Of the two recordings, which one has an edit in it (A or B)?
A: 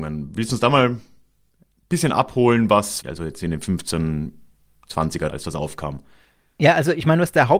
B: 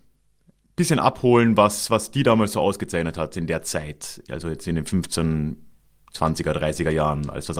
A